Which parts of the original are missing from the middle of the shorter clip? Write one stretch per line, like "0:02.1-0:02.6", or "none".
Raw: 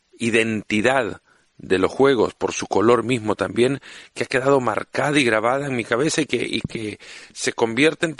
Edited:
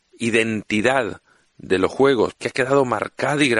0:02.3-0:04.1